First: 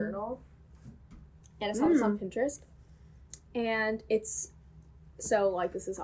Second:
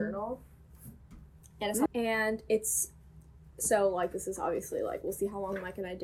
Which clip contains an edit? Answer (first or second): second